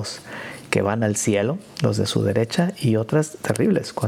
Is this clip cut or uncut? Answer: uncut